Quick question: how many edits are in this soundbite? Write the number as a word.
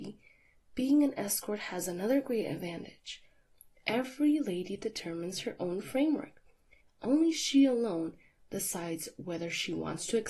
one